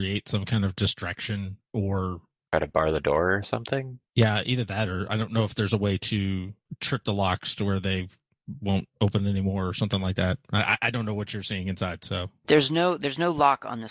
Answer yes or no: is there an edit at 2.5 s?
yes